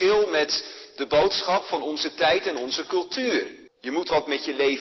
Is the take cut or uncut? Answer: cut